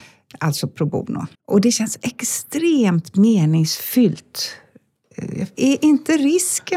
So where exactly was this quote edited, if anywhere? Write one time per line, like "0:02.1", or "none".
0:01.3
0:05.6